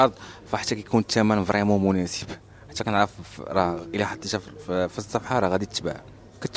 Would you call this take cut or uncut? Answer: uncut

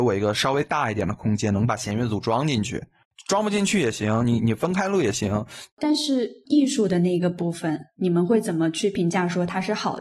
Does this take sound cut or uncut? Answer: cut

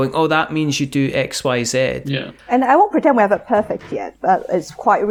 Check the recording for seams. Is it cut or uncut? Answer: cut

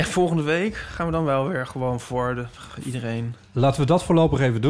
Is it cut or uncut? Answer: uncut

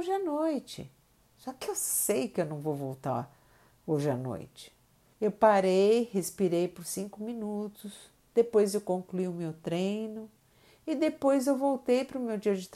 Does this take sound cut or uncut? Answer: cut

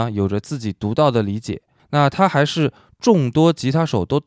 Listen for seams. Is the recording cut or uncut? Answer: uncut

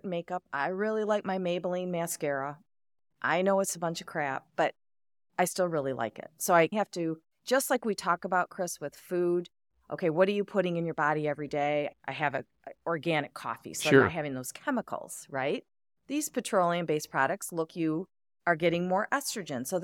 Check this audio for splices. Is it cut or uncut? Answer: cut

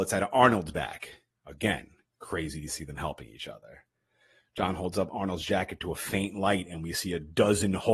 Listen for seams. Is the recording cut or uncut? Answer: uncut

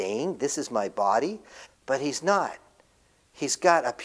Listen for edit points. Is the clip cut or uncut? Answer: cut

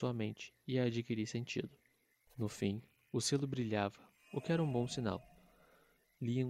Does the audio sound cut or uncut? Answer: cut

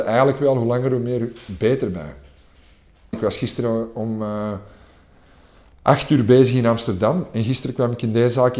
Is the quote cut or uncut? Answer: cut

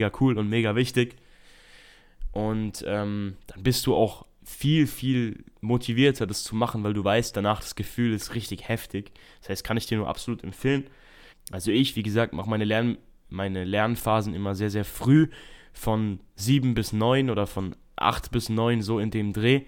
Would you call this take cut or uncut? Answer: cut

